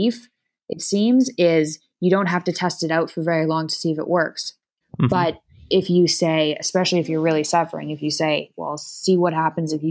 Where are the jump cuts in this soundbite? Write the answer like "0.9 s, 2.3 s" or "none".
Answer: 4.8 s